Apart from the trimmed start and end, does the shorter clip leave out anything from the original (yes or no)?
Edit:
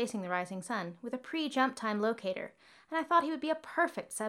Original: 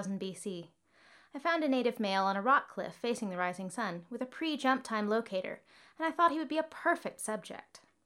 no